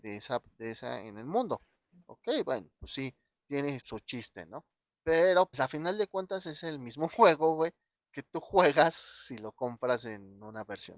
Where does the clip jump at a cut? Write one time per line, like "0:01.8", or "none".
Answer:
0:03.8
0:05.5